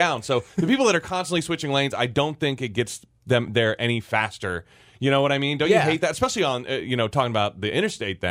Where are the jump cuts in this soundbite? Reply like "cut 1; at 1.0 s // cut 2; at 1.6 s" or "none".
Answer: none